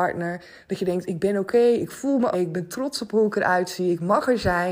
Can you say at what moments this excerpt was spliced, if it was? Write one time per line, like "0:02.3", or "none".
0:02.3